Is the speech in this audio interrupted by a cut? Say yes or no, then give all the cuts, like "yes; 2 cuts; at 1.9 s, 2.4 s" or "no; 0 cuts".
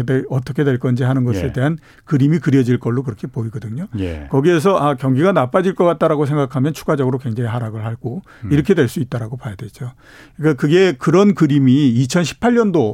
no; 0 cuts